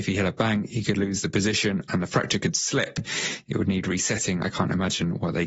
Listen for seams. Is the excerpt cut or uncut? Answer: uncut